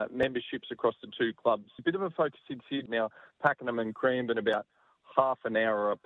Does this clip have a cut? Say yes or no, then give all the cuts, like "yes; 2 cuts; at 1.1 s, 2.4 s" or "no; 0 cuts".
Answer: yes; 2 cuts; at 1.8 s, 2.9 s